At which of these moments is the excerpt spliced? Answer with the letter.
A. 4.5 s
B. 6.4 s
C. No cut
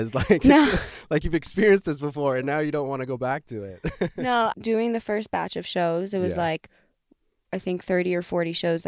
A